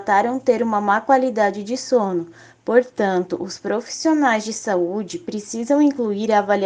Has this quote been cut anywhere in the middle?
no; 0 cuts

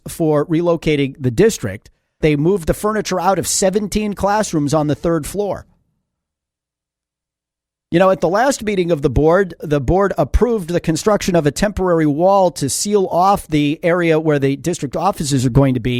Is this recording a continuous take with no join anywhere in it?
no; 2 cuts; at 2.2 s, 9.6 s

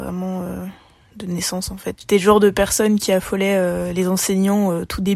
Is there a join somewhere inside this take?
yes; 1 cut; at 1.9 s

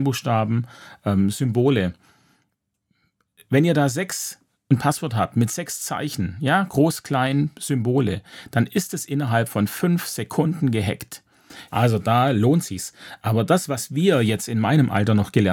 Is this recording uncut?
no; 1 cut; at 11.7 s

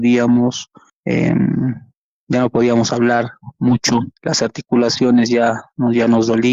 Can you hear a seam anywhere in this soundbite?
yes; 1 cut; at 4.2 s

